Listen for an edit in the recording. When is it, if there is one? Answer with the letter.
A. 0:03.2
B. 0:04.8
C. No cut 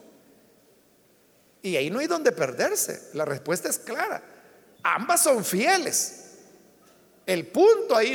B